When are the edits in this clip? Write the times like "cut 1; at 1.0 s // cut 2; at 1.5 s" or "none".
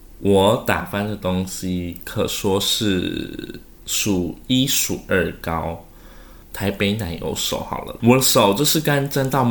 cut 1; at 6.5 s // cut 2; at 8.0 s